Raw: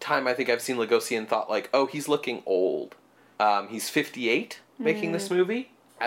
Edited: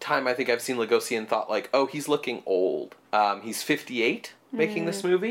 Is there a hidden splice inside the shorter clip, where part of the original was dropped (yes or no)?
yes